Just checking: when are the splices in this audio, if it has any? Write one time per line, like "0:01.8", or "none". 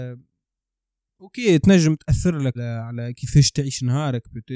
0:02.5